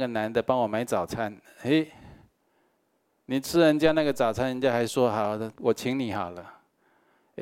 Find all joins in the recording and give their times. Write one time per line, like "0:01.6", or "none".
0:05.5